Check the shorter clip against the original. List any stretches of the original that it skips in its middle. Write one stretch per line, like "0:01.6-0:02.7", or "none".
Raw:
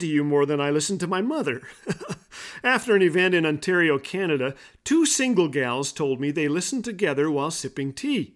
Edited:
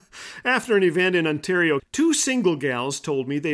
0:04.0-0:04.7